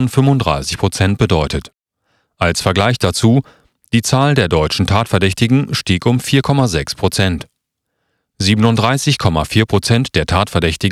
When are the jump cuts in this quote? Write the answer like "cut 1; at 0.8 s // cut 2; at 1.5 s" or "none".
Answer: none